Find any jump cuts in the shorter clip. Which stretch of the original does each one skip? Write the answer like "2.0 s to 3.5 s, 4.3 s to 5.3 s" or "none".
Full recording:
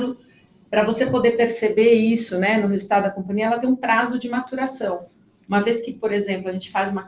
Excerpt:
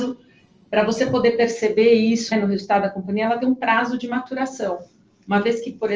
2.3 s to 2.5 s